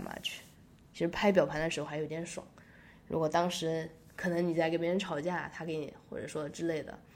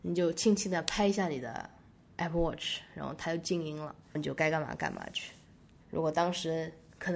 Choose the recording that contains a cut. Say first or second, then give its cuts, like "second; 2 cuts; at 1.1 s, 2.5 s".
second; 1 cut; at 5.8 s